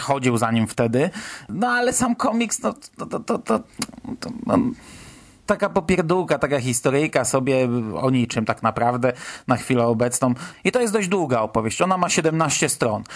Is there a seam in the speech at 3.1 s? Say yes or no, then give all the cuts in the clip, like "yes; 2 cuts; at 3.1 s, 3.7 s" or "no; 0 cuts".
no; 2 cuts; at 5.5 s, 10.5 s